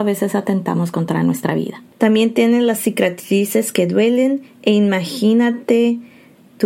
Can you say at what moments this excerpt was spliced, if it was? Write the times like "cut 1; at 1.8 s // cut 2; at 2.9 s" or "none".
cut 1; at 1.9 s